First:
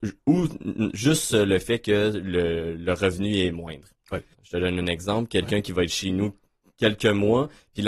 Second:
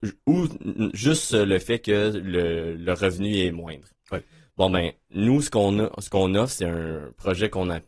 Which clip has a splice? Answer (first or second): first